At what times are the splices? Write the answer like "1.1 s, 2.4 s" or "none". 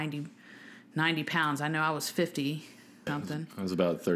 3.1 s

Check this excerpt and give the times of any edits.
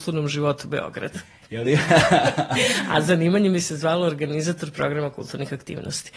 none

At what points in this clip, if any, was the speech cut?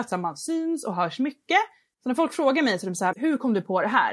3.1 s

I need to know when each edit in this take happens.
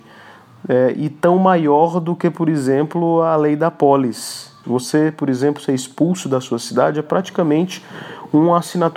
4.6 s

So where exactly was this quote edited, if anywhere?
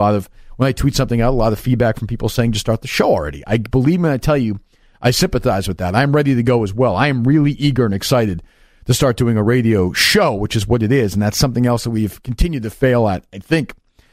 none

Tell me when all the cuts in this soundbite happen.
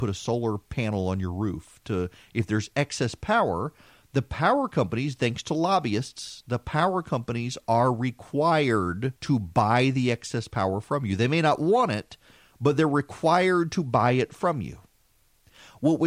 9.2 s

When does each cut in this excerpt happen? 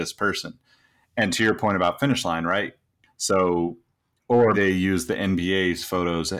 3.0 s, 4.5 s

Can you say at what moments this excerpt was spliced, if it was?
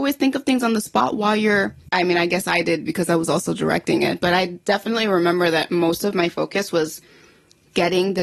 none

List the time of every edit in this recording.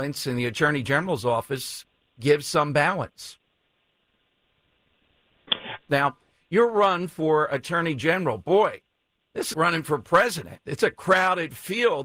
5.9 s, 9.5 s

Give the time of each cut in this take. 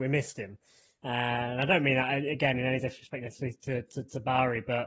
none

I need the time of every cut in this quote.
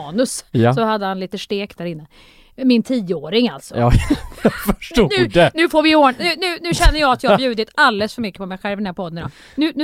none

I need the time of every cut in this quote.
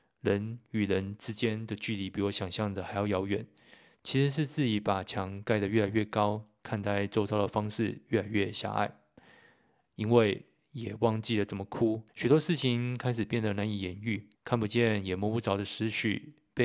12.1 s, 14.3 s

